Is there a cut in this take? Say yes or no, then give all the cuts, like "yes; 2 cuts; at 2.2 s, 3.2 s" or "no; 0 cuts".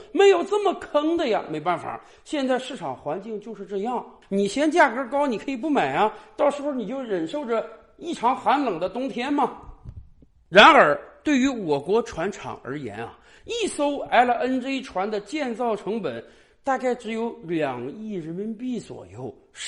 no; 0 cuts